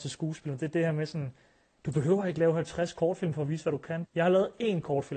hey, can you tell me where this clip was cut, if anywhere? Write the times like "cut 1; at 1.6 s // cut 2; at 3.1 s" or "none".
cut 1; at 4.1 s